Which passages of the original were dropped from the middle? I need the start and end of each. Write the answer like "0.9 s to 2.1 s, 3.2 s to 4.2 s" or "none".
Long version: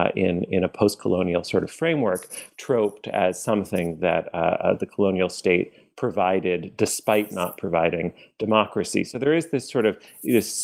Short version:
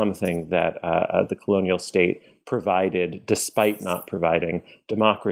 none